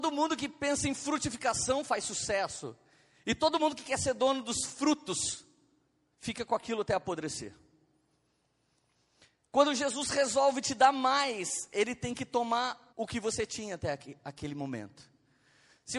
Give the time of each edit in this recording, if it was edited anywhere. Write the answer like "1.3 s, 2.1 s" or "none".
12.9 s